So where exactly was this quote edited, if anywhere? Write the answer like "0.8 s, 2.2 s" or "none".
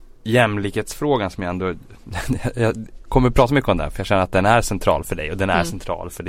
none